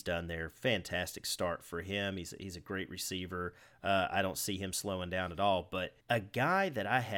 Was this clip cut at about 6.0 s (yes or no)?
yes